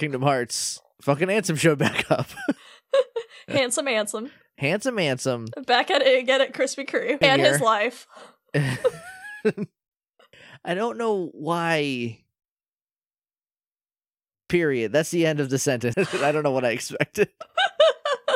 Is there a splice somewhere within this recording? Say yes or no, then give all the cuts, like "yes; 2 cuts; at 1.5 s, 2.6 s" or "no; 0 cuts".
yes; 2 cuts; at 7.2 s, 15.9 s